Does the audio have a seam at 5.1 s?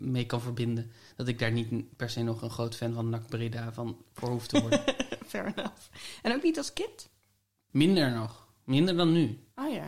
no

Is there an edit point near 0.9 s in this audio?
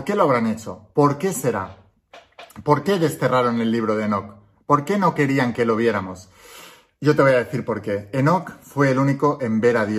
yes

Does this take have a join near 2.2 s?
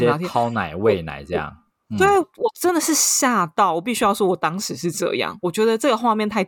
yes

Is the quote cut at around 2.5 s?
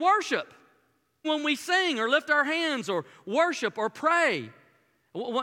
no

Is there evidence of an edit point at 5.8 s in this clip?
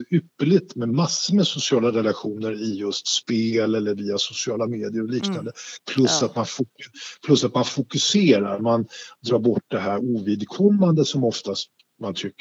yes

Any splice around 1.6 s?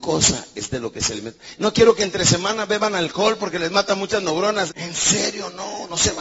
yes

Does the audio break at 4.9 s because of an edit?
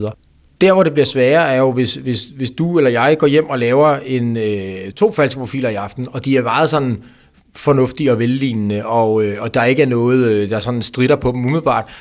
yes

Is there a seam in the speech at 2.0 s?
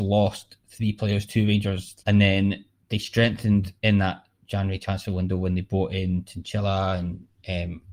yes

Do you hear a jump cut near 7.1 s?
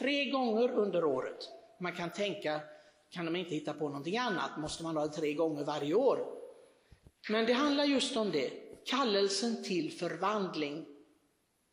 yes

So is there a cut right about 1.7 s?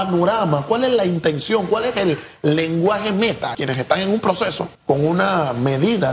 no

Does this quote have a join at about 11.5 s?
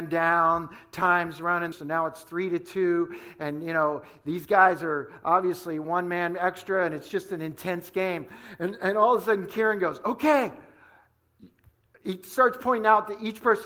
no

